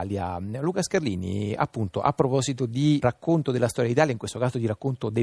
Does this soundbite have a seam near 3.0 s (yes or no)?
yes